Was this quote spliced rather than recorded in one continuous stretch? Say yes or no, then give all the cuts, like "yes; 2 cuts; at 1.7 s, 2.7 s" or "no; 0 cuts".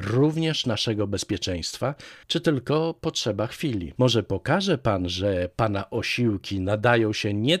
yes; 2 cuts; at 2.2 s, 4.0 s